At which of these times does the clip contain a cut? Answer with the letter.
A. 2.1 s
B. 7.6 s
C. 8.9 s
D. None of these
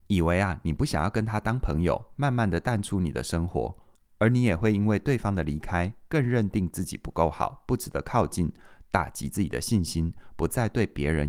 D